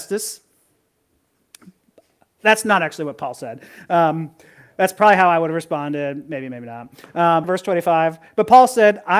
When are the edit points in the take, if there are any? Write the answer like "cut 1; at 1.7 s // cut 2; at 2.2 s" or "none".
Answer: cut 1; at 7.4 s